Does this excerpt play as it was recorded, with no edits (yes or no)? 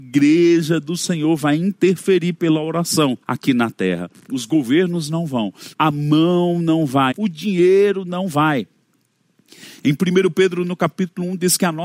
no